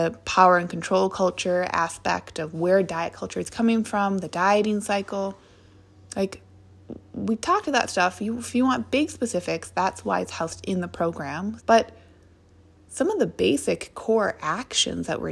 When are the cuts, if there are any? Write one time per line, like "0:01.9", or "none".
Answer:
0:11.6